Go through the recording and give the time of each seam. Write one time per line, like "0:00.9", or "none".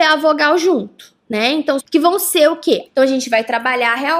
0:01.8
0:02.9